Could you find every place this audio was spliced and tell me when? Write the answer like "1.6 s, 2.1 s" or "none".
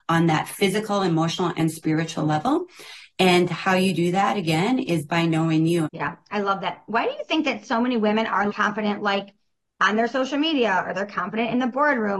5.9 s, 8.5 s